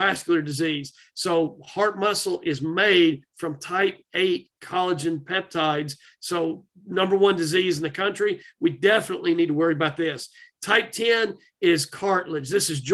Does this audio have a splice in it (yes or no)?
no